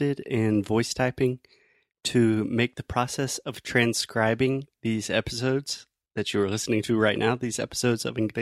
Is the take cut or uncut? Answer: uncut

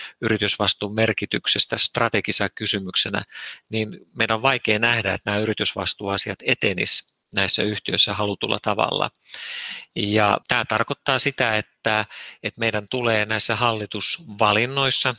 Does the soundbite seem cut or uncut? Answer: cut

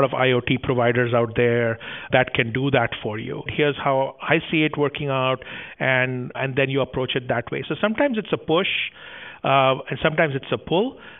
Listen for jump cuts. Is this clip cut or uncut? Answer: cut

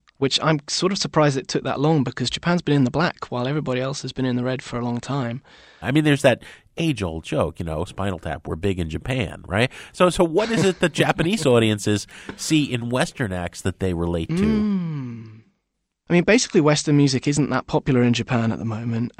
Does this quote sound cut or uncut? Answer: cut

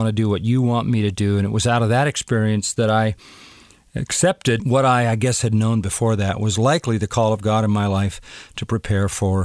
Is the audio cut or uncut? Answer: uncut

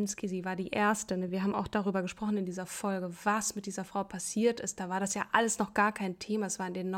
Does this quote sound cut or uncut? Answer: uncut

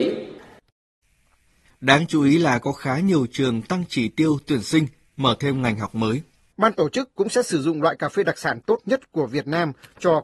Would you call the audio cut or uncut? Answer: cut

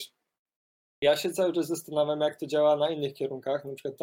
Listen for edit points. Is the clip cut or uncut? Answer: uncut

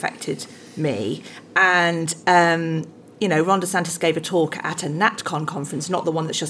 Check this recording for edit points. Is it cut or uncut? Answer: uncut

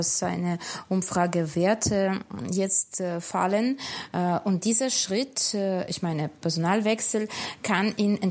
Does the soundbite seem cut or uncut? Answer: uncut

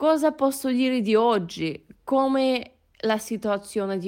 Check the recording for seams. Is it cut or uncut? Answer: uncut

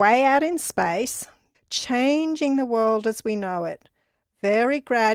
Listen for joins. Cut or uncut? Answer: cut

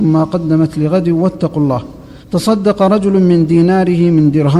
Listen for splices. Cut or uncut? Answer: cut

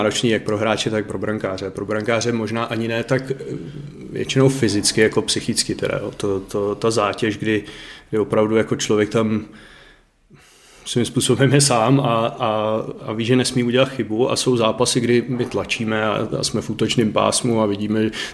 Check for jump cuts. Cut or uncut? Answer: uncut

